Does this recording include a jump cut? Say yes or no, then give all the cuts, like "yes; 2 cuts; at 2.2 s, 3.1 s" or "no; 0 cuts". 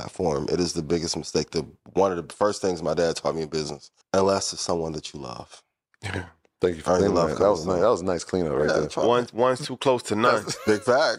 yes; 1 cut; at 4.0 s